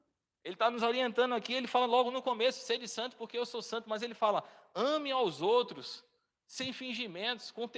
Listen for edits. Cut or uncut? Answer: uncut